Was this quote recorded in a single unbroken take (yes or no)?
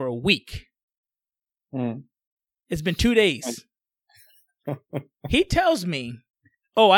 yes